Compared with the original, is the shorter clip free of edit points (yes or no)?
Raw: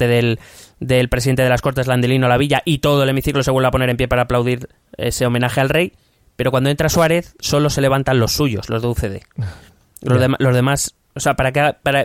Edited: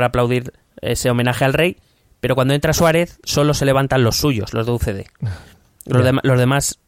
yes